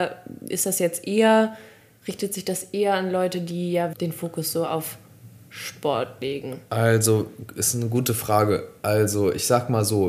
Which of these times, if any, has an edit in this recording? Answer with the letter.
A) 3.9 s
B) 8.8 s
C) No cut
A